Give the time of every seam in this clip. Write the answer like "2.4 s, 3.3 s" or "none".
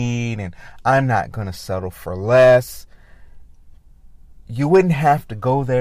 none